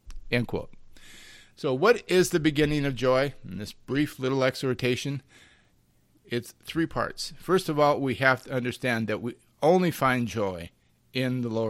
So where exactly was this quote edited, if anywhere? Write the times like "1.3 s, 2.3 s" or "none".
none